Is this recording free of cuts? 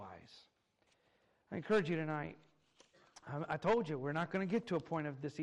yes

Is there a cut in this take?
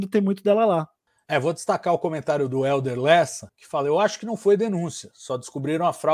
no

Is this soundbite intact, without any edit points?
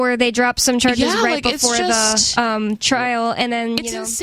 yes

